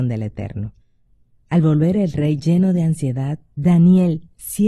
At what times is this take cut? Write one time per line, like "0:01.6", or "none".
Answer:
0:03.5